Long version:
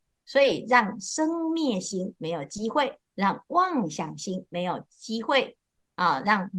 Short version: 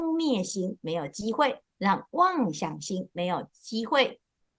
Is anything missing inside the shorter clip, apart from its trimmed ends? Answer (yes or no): no